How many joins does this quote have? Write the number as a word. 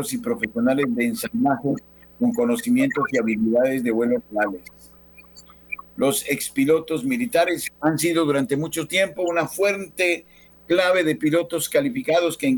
one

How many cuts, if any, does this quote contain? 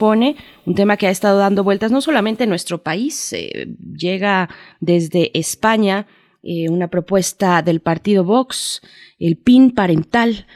zero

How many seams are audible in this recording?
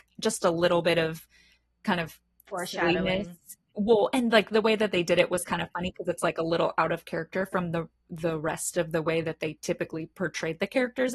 zero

